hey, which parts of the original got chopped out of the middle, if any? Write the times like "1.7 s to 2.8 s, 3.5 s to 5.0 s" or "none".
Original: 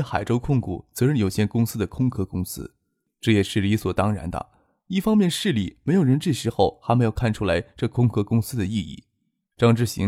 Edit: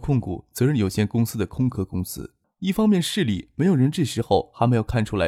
2.8 s to 4.7 s